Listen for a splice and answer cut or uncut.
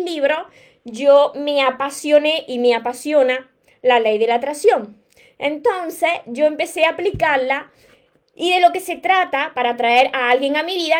uncut